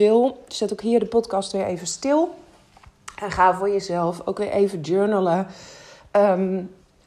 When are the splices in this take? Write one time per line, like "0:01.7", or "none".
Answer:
none